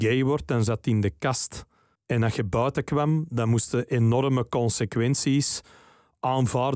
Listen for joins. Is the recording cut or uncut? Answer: uncut